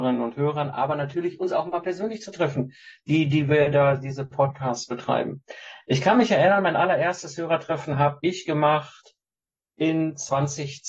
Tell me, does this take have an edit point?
no; 0 cuts

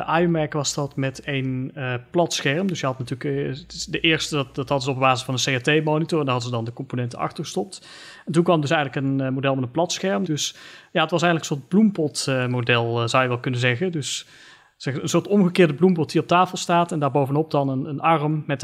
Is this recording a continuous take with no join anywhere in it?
no; 1 cut; at 10.2 s

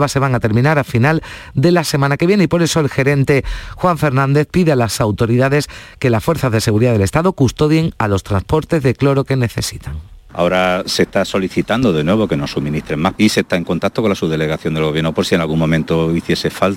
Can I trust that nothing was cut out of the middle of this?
no; 1 cut; at 13.2 s

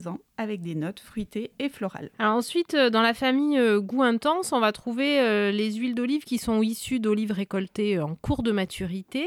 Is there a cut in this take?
yes; 1 cut; at 2.1 s

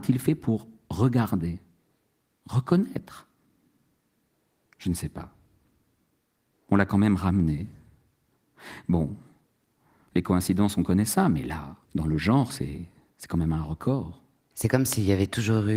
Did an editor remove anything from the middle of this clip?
yes; 2 cuts; at 11.8 s, 14.5 s

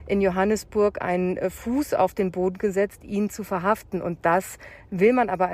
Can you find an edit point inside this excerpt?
no; 0 cuts

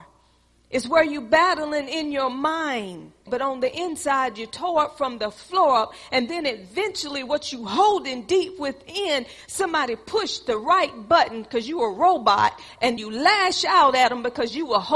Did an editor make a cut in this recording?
yes; 2 cuts; at 3.3 s, 13.0 s

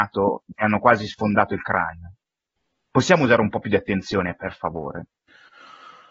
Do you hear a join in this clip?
no; 0 cuts

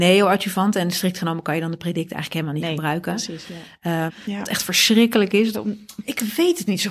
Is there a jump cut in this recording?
yes; 2 cuts; at 4.1 s, 5.5 s

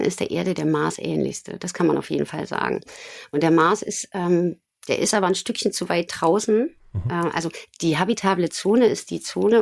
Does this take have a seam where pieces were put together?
no; 0 cuts

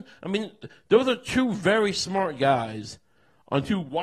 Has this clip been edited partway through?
no; 0 cuts

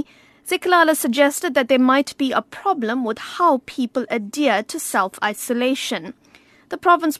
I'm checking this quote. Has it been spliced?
no; 0 cuts

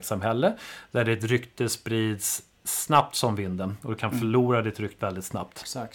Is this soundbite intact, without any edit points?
no; 1 cut; at 5.0 s

